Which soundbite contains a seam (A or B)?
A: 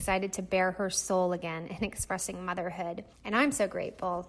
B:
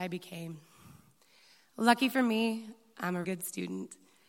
B